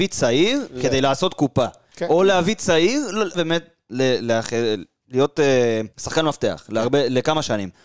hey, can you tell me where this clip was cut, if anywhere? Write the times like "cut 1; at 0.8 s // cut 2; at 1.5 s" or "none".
cut 1; at 3.3 s // cut 2; at 5.9 s